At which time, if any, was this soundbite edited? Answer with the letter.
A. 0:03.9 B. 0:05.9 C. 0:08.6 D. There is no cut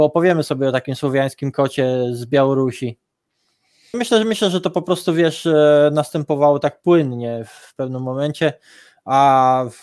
A